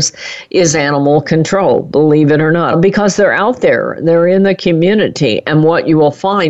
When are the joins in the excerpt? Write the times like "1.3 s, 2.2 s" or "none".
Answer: 2.7 s